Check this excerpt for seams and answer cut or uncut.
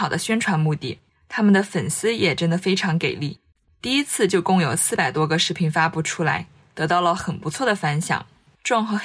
uncut